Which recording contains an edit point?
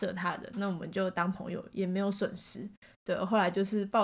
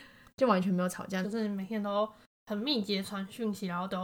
second; 1 cut; at 1.2 s

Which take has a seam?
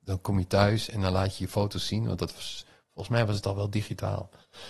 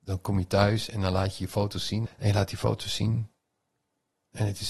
second; 1 cut; at 2.1 s

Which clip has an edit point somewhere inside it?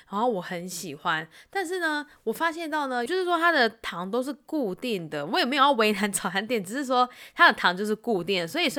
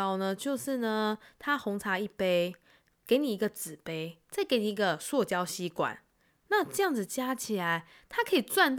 first; 1 cut; at 3.1 s

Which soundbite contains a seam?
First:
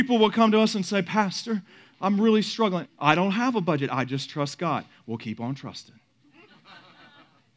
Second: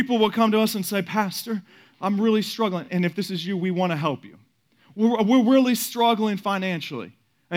first; 1 cut; at 2.9 s

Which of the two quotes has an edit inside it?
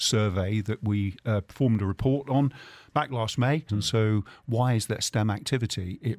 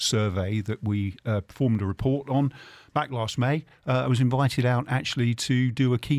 first; 1 cut; at 3.7 s

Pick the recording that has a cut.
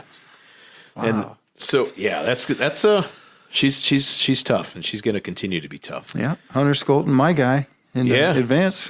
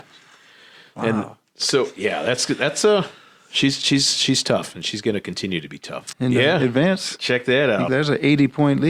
second; 2 cuts; at 6.1 s, 7.9 s

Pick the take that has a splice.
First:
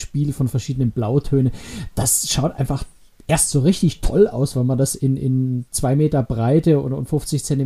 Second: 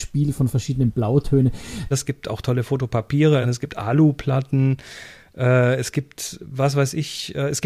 second; 2 cuts; at 1.9 s, 3.4 s

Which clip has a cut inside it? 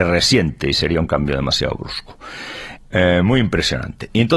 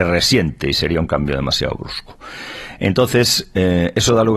first; 1 cut; at 2.8 s

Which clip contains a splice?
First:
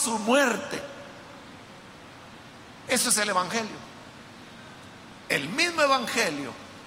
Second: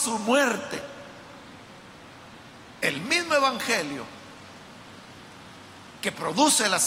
second; 1 cut; at 2.8 s

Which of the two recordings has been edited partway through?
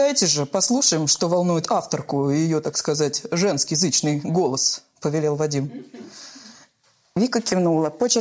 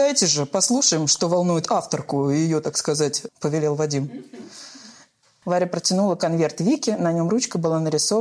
second; 2 cuts; at 3.3 s, 5.4 s

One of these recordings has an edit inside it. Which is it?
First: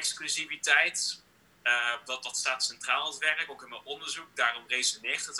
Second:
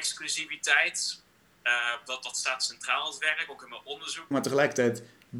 second; 1 cut; at 4.3 s

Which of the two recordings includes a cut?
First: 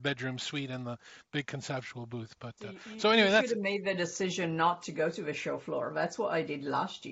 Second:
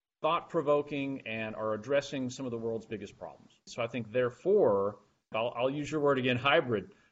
second; 2 cuts; at 3.7 s, 5.3 s

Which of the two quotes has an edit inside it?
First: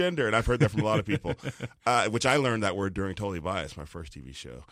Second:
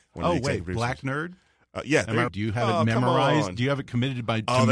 second; 1 cut; at 2.3 s

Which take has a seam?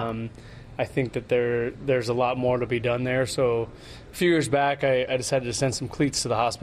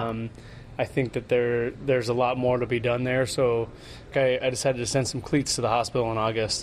second; 1 cut; at 4.1 s

